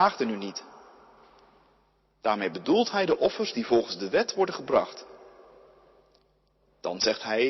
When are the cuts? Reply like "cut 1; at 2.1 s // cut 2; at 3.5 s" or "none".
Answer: none